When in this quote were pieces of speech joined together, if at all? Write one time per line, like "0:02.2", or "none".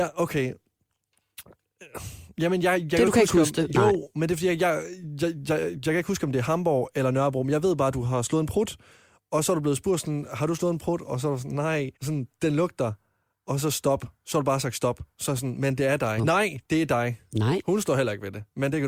0:11.9
0:16.2

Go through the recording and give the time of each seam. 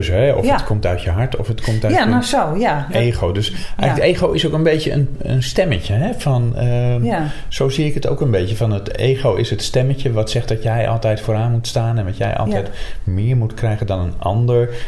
0:05.2

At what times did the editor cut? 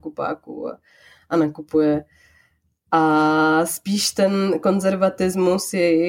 none

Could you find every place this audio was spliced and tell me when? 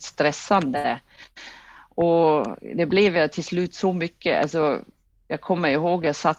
none

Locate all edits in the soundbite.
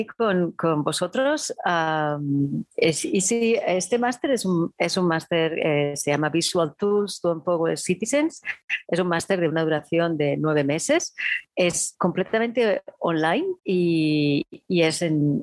0:13.6

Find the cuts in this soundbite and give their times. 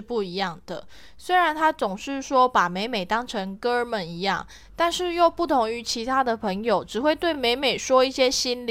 none

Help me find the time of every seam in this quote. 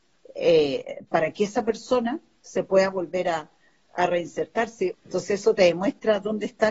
0:04.9

